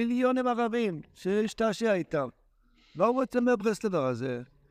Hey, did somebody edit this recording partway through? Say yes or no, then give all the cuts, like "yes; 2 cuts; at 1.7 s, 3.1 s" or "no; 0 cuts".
no; 0 cuts